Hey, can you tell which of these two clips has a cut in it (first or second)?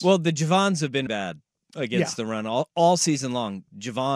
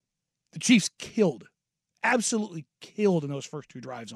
first